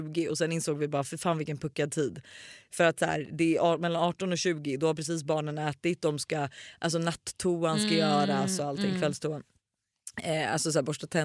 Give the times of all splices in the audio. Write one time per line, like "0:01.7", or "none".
none